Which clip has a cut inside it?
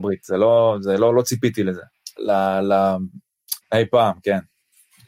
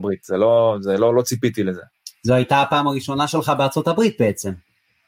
first; 2 cuts; at 2.2 s, 3.6 s

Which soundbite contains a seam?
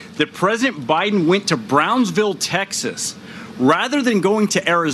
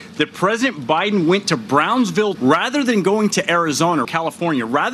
second; 2 cuts; at 2.3 s, 4.0 s

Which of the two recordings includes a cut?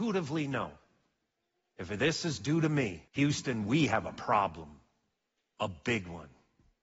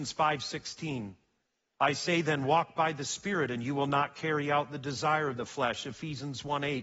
first; 1 cut; at 3.1 s

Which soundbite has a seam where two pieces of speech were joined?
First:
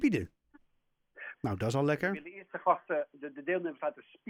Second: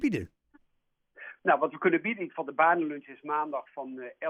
first; 1 cut; at 1.3 s

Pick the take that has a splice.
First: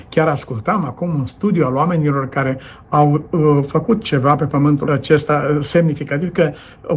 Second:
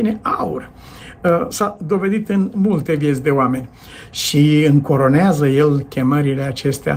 first; 1 cut; at 4.8 s

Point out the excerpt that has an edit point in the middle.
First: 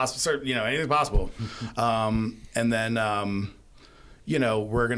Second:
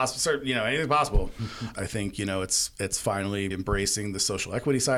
second; 2 cuts; at 1.7 s, 3.5 s

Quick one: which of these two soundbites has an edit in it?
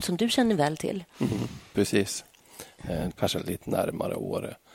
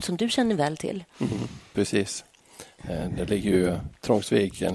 first; 1 cut; at 3.1 s

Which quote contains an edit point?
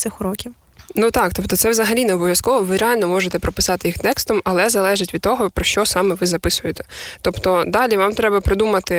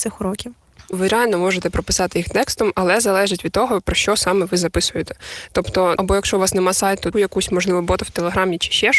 second; 3 cuts; at 0.9 s, 6.0 s, 7.1 s

